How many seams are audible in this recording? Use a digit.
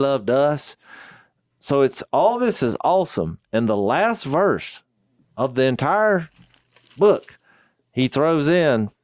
0